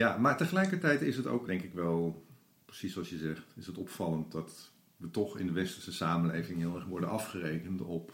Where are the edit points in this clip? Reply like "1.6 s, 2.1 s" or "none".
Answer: 1.5 s

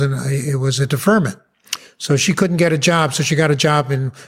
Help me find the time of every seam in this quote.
none

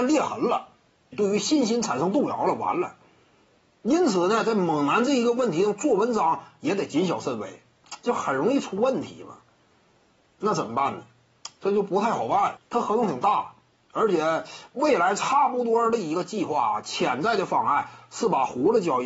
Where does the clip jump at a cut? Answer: 1.1 s, 12.6 s

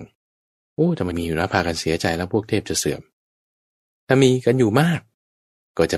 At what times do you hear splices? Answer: 1.1 s

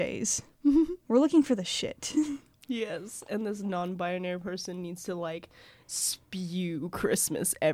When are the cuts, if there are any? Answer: none

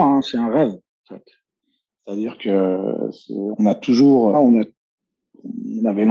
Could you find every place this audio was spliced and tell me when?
4.3 s

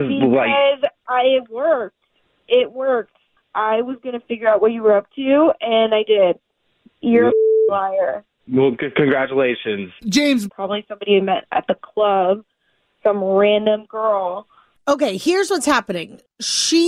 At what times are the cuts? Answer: 10.5 s

